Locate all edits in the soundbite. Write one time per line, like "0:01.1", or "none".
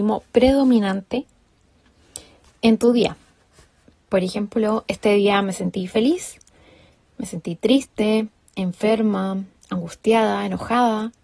0:08.3

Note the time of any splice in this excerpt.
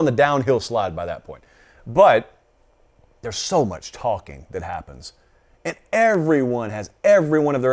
none

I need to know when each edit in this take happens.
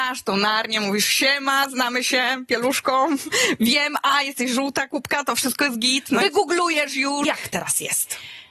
0:06.2
0:07.2

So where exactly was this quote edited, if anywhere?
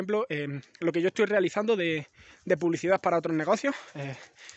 none

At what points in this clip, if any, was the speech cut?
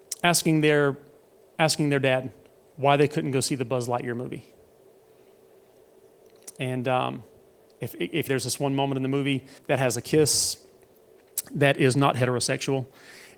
0:08.3
0:09.6

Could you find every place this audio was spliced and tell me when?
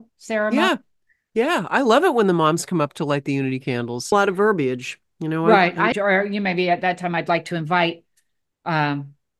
0:04.1
0:05.9

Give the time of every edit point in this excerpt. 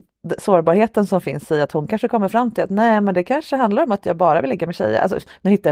none

